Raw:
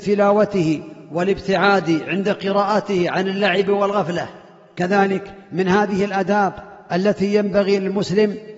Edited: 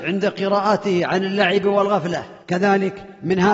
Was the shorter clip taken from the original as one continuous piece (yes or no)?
no